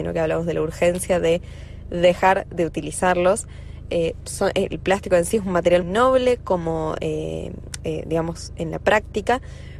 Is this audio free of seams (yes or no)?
no